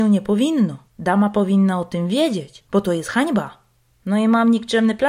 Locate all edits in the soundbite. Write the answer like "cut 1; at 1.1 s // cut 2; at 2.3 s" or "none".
cut 1; at 2.6 s